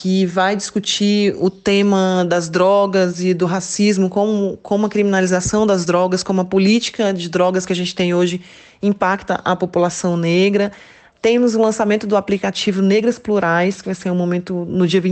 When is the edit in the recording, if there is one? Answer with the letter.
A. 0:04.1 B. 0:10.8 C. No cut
C